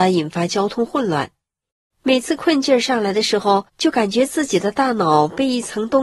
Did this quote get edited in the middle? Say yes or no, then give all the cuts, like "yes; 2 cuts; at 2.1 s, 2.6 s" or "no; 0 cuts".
yes; 2 cuts; at 1.9 s, 3.7 s